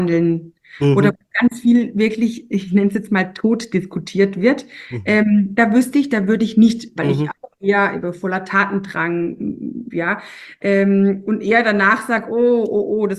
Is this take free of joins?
no; 2 cuts; at 7.0 s, 9.9 s

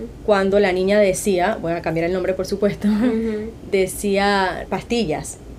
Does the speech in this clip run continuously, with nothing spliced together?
no; 1 cut; at 4.7 s

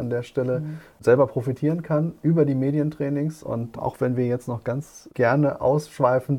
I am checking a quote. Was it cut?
no; 0 cuts

